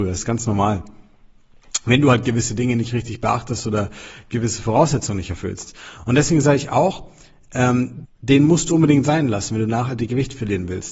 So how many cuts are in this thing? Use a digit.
1